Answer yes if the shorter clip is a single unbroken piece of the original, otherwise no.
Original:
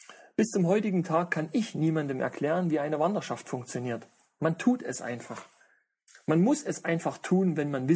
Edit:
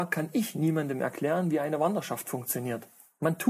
yes